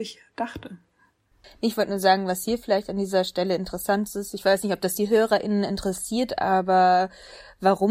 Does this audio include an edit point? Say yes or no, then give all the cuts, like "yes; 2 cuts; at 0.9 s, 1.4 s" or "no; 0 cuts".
no; 0 cuts